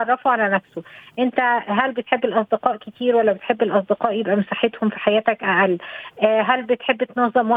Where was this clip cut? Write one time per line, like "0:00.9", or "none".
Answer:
none